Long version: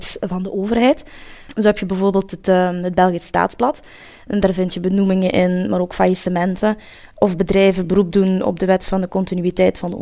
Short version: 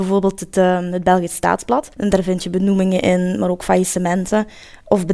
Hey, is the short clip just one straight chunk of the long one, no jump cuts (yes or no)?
no